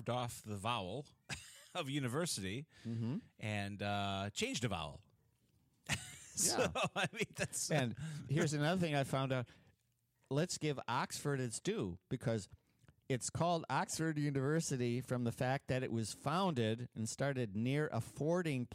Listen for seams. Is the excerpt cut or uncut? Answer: uncut